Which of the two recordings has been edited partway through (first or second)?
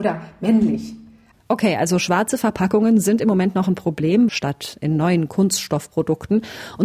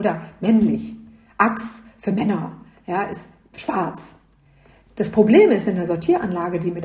first